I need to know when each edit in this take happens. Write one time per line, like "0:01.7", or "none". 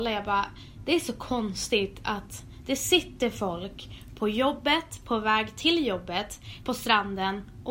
0:06.6